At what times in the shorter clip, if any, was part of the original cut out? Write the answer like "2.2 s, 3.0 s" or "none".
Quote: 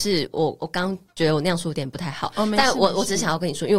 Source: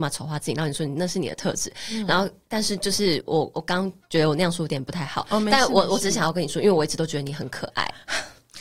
none